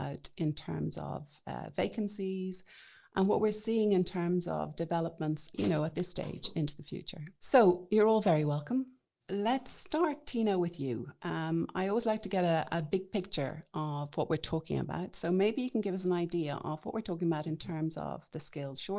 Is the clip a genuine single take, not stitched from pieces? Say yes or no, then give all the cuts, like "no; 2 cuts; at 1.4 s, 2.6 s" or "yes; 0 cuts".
no; 1 cut; at 7.4 s